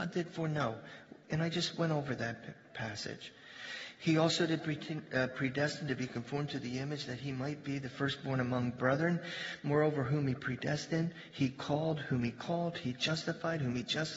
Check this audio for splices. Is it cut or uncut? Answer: uncut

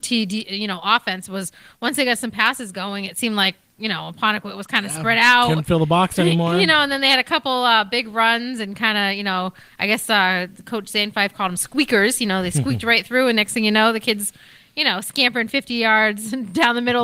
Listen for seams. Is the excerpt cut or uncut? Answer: uncut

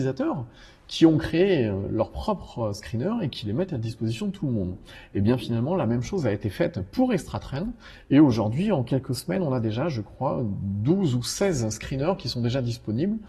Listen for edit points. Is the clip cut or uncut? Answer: uncut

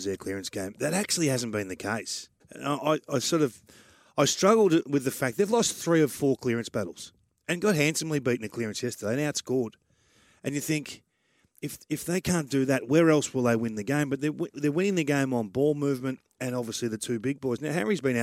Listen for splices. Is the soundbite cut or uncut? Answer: cut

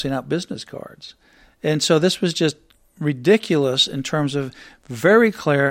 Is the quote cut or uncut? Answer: uncut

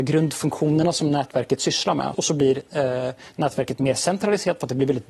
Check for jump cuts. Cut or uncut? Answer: cut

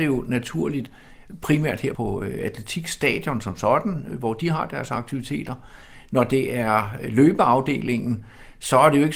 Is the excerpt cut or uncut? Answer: cut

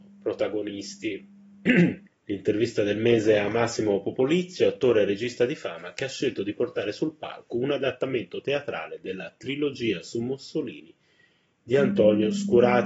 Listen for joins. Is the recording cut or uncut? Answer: cut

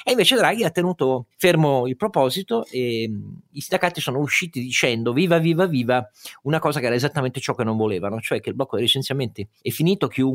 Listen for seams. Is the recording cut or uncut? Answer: uncut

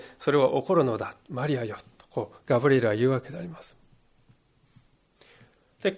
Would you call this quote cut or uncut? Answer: uncut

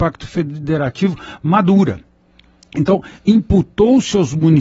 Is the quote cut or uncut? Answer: uncut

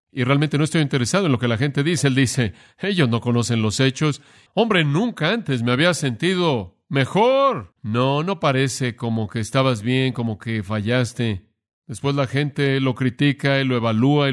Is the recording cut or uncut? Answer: cut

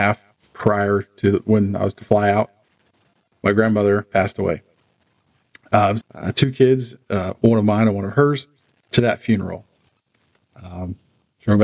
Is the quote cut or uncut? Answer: cut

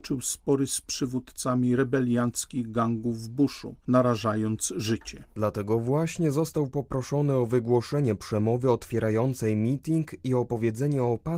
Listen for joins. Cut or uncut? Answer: uncut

